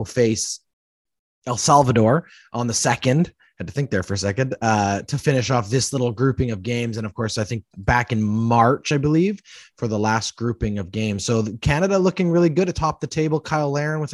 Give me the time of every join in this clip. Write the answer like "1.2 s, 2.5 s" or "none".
none